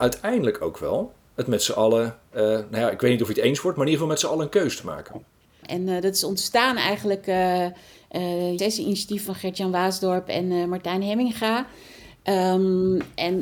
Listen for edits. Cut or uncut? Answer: cut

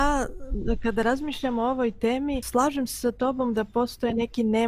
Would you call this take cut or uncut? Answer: cut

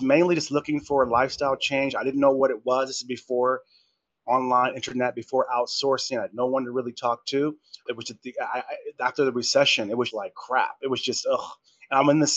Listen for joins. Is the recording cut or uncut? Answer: cut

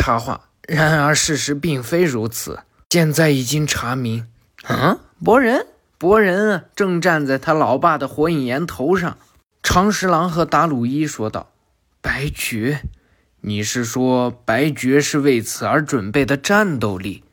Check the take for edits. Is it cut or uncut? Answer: cut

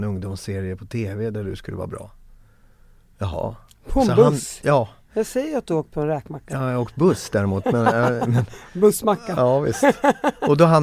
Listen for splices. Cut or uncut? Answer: uncut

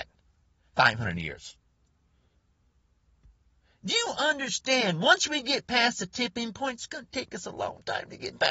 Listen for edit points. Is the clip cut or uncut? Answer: uncut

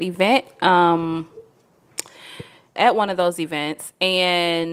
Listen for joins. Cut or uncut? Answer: cut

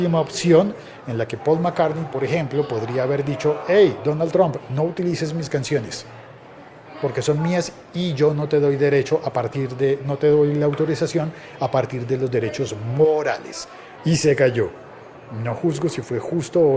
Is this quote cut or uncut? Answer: cut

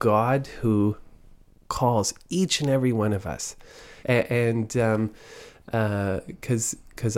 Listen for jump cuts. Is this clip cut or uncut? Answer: cut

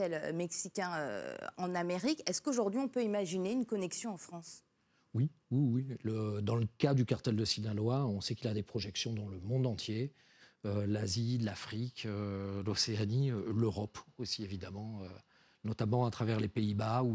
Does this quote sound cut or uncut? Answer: uncut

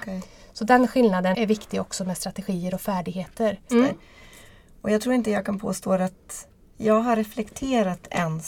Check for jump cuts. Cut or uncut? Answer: cut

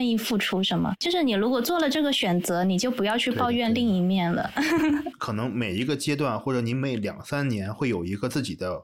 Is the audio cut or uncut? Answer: uncut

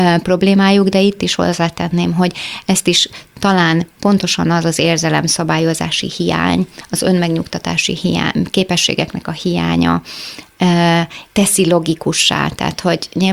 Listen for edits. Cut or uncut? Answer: cut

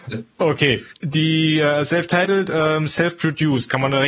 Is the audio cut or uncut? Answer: cut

